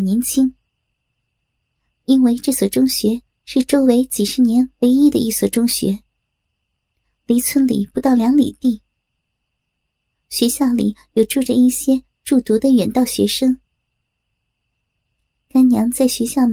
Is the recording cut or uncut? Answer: uncut